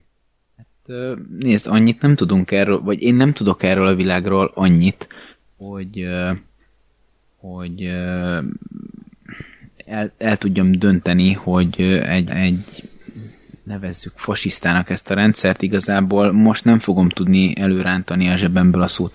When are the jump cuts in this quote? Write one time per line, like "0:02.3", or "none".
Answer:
0:12.3